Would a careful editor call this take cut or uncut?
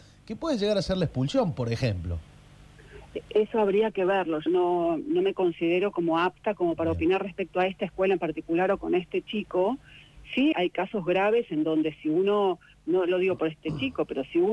cut